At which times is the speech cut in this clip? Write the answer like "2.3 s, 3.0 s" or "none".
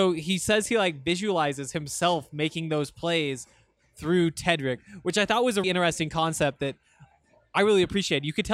5.6 s